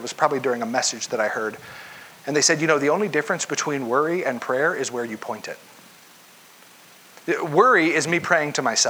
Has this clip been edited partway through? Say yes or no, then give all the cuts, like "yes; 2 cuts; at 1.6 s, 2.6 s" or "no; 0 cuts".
no; 0 cuts